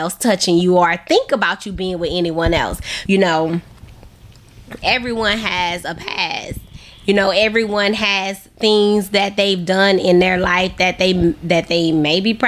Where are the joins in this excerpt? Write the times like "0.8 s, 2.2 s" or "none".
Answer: 3.0 s, 4.8 s